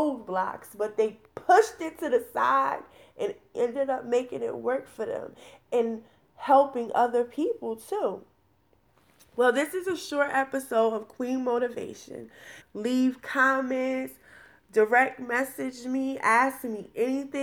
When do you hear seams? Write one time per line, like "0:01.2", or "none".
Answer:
0:03.5
0:12.6